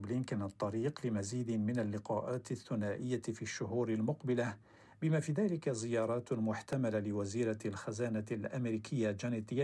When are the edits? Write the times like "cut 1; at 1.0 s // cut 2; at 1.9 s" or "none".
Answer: none

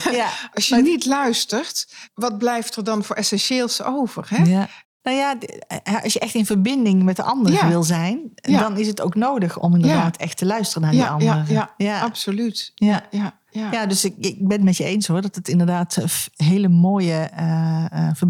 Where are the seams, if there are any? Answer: cut 1; at 9.6 s // cut 2; at 13.5 s

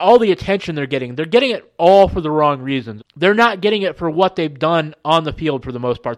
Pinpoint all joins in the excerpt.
cut 1; at 3.0 s

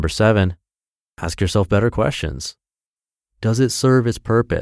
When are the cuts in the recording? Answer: none

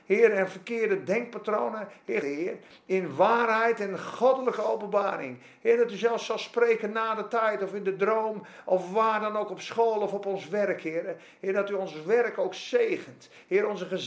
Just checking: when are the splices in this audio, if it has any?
cut 1; at 2.2 s

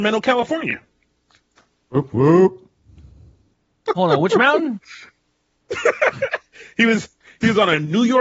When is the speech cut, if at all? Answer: none

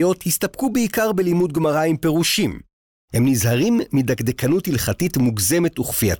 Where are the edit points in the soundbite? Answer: cut 1; at 3.0 s

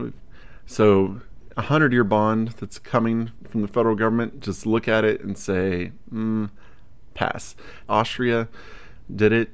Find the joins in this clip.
cut 1; at 7.9 s

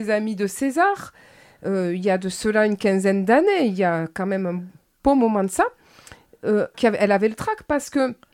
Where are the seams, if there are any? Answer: cut 1; at 6.7 s

